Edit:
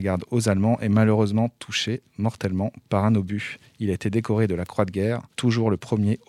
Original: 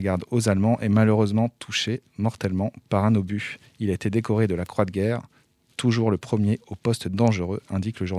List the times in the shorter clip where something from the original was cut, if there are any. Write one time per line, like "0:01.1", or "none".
0:05.3